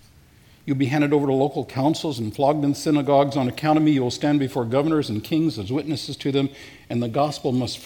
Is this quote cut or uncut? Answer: uncut